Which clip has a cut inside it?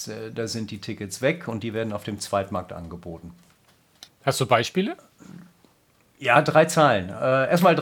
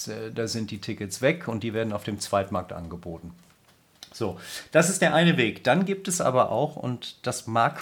first; 1 cut; at 4.1 s

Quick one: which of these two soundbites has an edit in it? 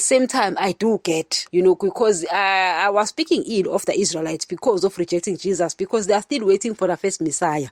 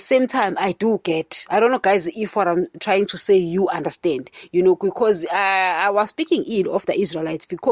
first; 1 cut; at 1.5 s

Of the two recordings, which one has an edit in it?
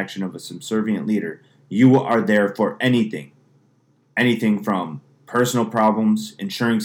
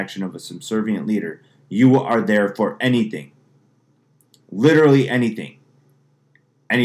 first; 1 cut; at 4.1 s

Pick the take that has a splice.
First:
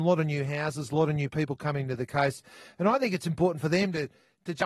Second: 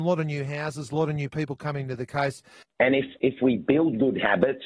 second; 1 cut; at 2.6 s

